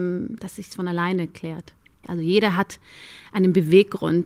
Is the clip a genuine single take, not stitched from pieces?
no; 1 cut; at 2.0 s

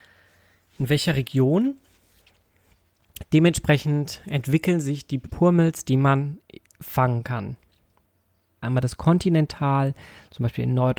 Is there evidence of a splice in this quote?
yes; 1 cut; at 8.6 s

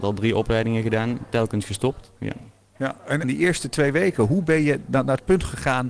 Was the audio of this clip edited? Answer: yes; 2 cuts; at 2.2 s, 3.2 s

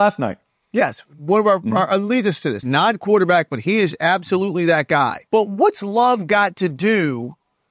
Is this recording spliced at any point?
yes; 2 cuts; at 2.6 s, 5.3 s

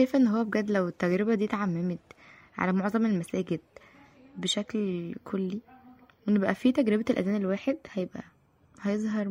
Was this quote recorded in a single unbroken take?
yes; 0 cuts

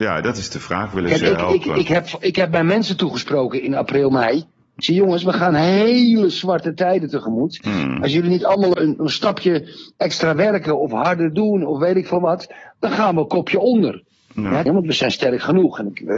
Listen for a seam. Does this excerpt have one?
yes; 2 cuts; at 8.7 s, 14.7 s

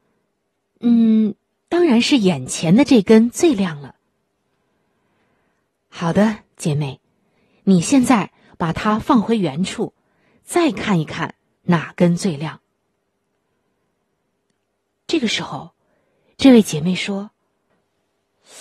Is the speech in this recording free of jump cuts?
yes; 0 cuts

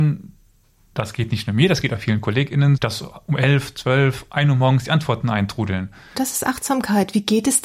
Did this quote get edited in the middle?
yes; 2 cuts; at 2.8 s, 6.1 s

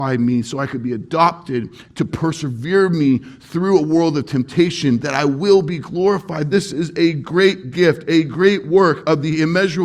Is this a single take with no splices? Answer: yes; 0 cuts

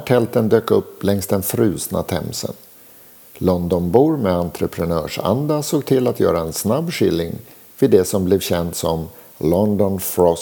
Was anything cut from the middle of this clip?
no; 0 cuts

